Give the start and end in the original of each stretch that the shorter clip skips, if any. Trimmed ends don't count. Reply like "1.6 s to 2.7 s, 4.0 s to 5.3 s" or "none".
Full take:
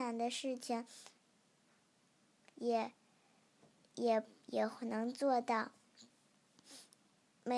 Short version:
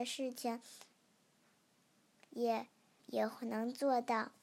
3.2 s to 4.4 s